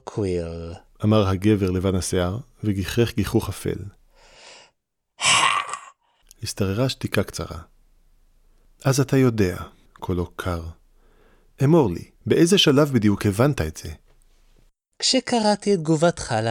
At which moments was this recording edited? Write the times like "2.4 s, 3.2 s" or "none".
6.2 s, 9.9 s, 12.2 s